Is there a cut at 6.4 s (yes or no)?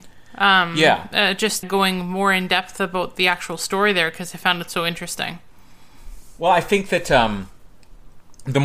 no